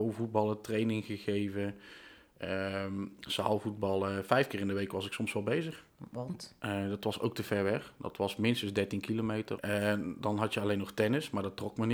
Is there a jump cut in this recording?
yes; 2 cuts; at 5.9 s, 9.6 s

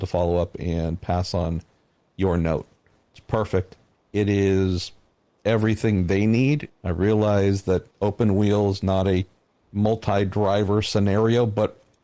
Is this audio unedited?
no; 3 cuts; at 3.9 s, 6.7 s, 7.9 s

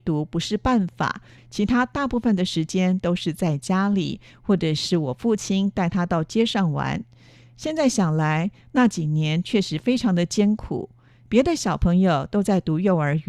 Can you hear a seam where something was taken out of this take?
yes; 1 cut; at 1.4 s

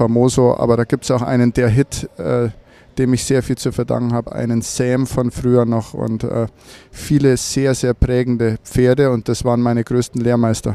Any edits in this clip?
no; 0 cuts

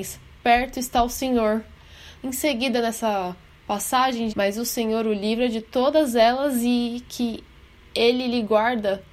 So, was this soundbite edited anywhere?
yes; 2 cuts; at 2.1 s, 4.3 s

